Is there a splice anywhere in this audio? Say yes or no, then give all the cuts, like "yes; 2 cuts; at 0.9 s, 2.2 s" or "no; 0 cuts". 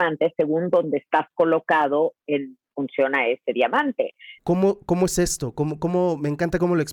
yes; 1 cut; at 4.4 s